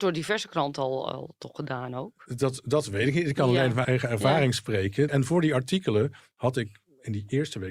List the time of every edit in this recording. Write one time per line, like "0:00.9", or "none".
0:03.8
0:05.1